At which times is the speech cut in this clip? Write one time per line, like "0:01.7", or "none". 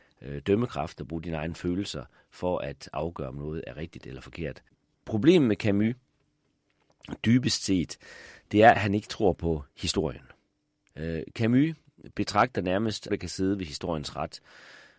0:10.9
0:13.1